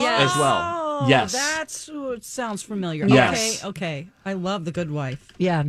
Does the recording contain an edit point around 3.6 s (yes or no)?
no